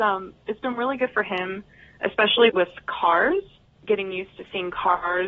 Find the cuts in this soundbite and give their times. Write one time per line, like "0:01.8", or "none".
0:02.5